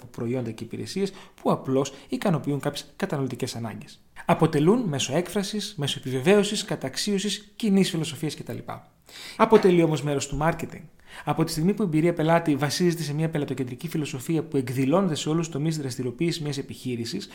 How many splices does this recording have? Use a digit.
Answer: 1